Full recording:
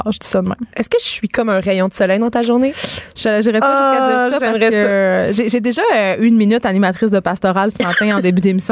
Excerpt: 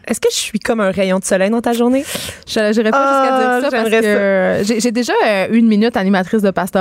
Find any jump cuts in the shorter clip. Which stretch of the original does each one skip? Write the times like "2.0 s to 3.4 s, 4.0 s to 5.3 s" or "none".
none